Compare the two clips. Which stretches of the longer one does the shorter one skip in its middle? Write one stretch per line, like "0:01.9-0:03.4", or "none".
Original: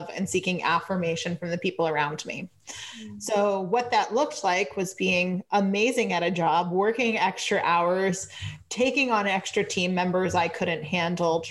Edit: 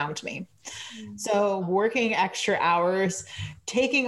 0:03.6-0:06.6